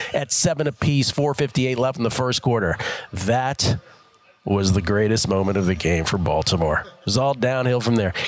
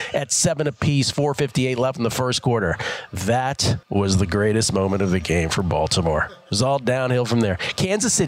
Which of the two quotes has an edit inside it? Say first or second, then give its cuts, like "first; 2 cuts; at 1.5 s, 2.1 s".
second; 1 cut; at 3.8 s